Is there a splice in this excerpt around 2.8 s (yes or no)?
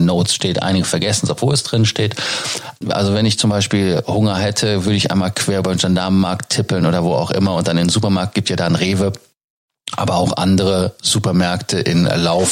yes